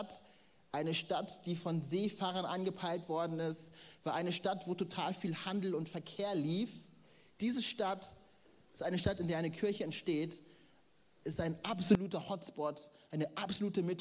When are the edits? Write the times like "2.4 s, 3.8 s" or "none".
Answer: none